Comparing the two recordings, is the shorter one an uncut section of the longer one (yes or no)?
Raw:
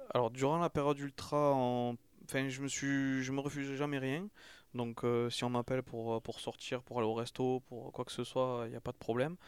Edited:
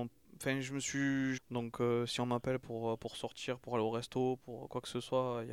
no